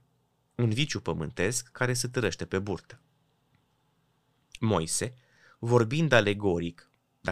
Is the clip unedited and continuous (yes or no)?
yes